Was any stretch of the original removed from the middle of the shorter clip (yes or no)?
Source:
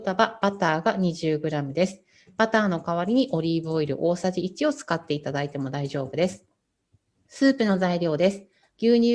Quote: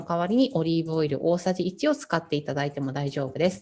no